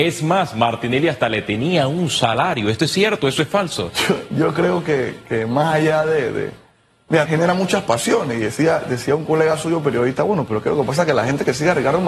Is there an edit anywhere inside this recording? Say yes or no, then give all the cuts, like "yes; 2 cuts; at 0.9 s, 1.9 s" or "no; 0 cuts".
yes; 1 cut; at 7.2 s